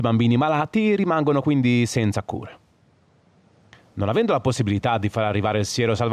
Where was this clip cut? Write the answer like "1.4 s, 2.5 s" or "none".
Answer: none